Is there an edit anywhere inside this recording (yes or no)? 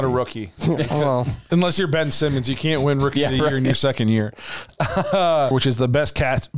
yes